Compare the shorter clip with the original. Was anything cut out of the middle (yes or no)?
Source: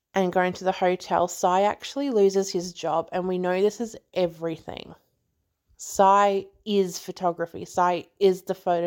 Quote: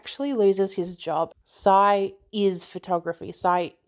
yes